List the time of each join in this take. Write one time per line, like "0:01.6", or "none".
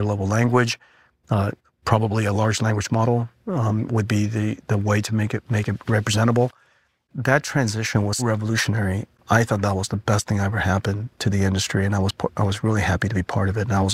0:08.2